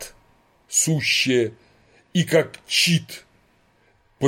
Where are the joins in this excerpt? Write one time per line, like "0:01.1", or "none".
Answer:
none

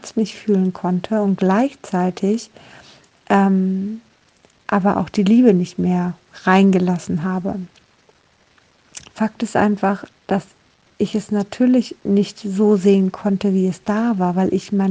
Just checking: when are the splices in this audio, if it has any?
0:09.1

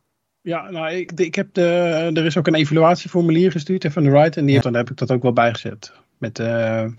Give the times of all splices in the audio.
0:01.1
0:04.6

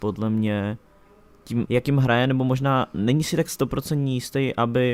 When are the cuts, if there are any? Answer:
0:01.7

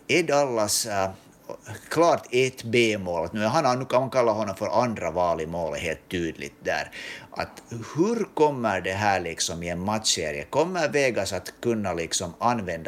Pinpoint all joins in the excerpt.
none

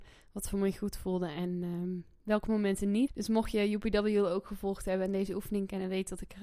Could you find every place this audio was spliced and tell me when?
0:03.1

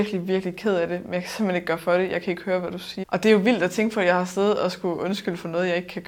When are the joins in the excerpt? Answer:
0:03.0

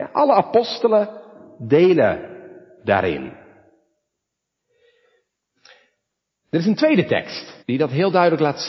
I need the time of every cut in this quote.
0:07.6

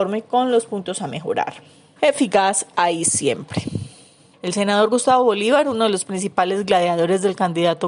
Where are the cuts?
0:02.0
0:04.3

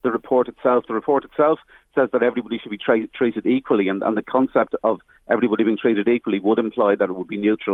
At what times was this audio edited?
none

